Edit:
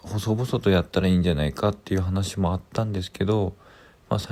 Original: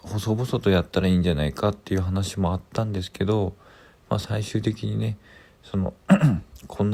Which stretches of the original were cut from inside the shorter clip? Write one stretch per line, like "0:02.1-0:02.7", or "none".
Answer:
none